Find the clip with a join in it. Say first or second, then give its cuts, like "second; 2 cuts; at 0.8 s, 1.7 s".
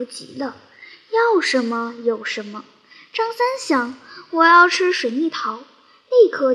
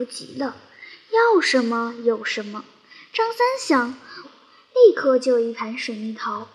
second; 1 cut; at 4.2 s